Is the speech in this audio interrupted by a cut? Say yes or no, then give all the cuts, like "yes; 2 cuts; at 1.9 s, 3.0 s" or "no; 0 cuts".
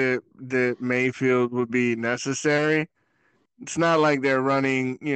yes; 1 cut; at 3.5 s